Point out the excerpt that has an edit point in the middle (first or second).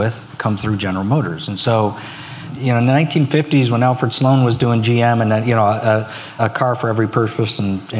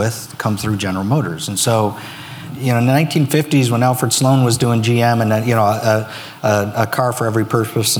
first